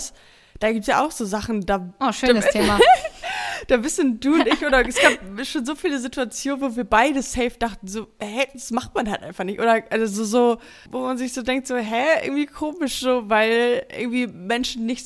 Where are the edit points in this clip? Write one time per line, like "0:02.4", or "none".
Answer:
0:10.9